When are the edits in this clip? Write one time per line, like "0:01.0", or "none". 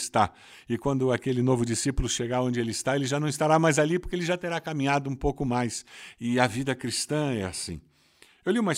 none

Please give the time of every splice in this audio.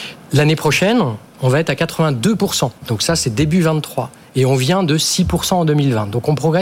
0:02.8

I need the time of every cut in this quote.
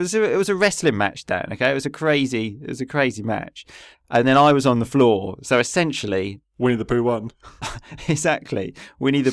none

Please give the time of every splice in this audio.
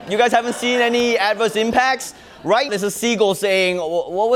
0:02.7

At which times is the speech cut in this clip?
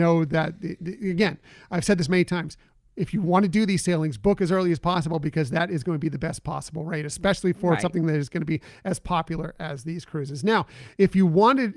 none

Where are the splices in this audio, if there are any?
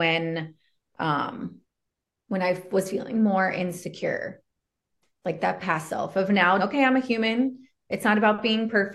0:06.6

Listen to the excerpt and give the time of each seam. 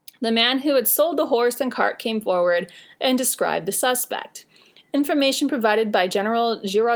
0:03.0

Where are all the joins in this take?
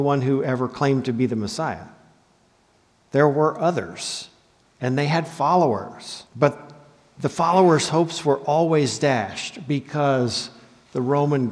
0:06.3

